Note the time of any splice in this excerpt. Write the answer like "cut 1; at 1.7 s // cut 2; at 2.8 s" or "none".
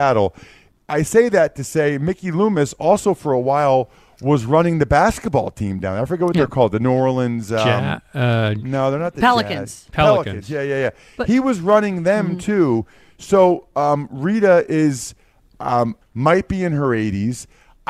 cut 1; at 16.0 s